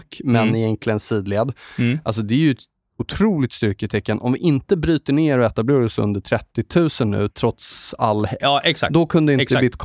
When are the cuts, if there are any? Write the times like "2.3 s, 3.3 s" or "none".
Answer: 7.3 s, 8.4 s